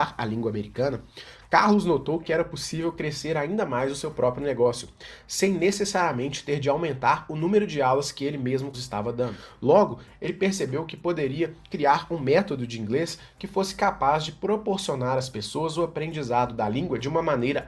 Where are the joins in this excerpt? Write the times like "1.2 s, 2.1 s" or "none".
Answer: 8.7 s